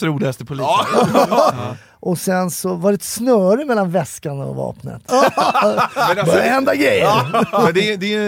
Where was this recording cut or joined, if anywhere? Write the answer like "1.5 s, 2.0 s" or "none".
1.5 s, 5.1 s